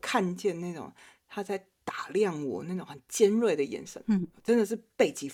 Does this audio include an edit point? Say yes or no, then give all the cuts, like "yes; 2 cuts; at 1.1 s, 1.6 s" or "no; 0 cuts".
no; 0 cuts